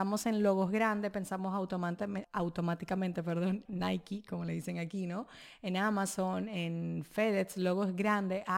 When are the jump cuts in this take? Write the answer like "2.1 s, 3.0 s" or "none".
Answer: 2.2 s, 3.7 s